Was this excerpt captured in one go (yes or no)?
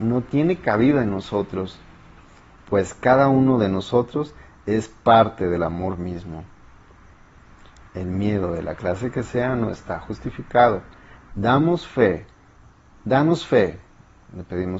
no